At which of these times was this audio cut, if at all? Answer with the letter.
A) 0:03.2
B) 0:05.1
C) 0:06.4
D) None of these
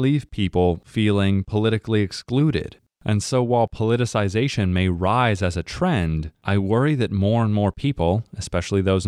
D